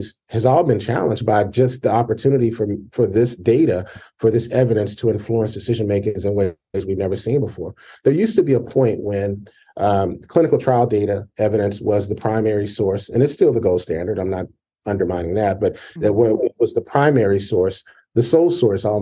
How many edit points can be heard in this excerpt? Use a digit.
0